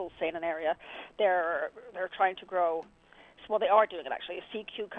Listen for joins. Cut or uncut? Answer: uncut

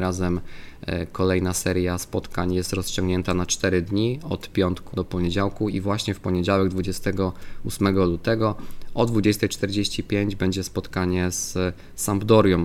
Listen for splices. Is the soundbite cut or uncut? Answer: cut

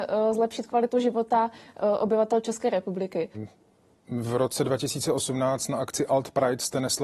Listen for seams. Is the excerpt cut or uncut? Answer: cut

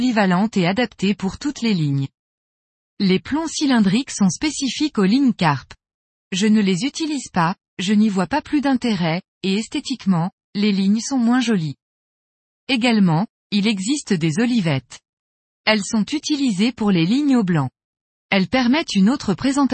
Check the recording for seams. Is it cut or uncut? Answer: uncut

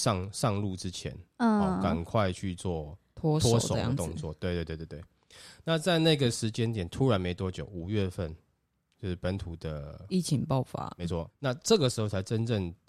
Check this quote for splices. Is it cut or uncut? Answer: uncut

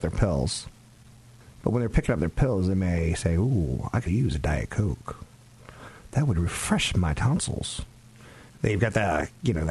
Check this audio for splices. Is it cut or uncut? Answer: cut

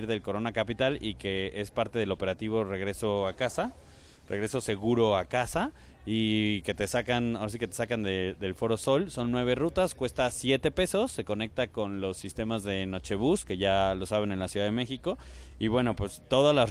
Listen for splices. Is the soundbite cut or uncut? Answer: uncut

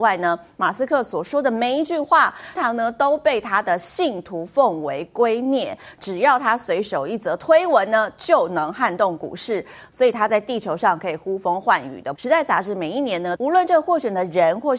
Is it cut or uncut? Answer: cut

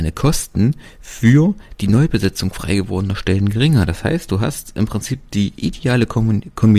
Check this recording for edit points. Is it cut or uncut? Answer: uncut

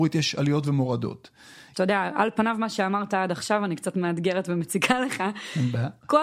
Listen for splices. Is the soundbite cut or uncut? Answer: cut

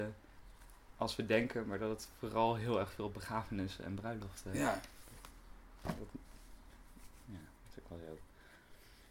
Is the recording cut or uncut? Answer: cut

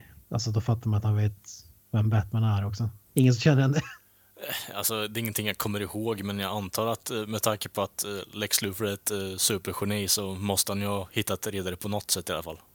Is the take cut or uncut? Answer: cut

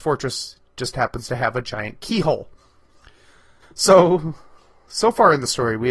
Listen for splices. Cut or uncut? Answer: cut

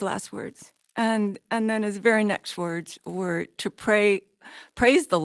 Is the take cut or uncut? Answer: uncut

